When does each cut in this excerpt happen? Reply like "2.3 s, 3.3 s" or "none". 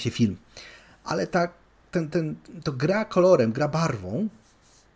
none